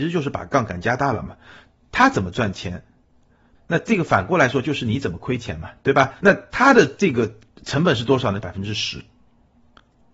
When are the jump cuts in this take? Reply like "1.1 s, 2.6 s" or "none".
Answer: 3.5 s, 6.2 s, 8.4 s